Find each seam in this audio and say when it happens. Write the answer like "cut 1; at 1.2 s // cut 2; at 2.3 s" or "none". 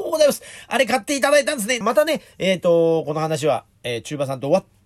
cut 1; at 1.8 s